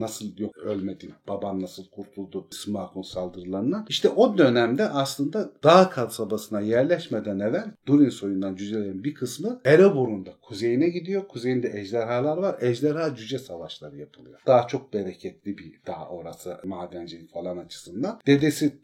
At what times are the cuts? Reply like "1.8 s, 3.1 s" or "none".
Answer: 14.4 s